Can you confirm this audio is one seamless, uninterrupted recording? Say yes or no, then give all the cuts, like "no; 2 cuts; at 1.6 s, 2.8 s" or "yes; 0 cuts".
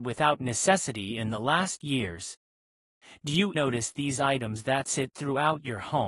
no; 1 cut; at 3.5 s